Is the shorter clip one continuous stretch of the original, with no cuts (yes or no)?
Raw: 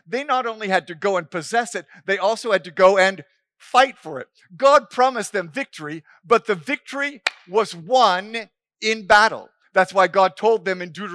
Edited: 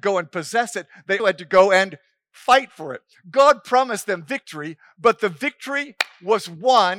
no